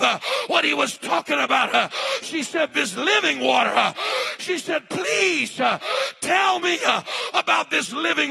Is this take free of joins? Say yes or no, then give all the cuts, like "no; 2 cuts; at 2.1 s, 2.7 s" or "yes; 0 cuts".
yes; 0 cuts